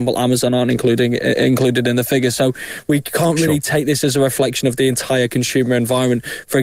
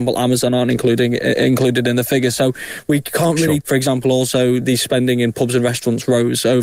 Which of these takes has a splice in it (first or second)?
second